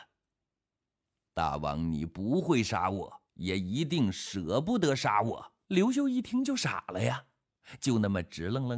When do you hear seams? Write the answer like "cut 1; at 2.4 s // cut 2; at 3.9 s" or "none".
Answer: cut 1; at 3.3 s // cut 2; at 5.6 s